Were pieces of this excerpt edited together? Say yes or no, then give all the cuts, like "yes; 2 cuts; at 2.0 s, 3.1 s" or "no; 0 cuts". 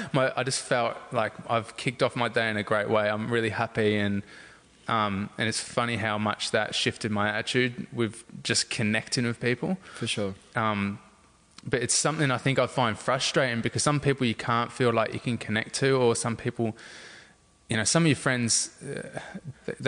no; 0 cuts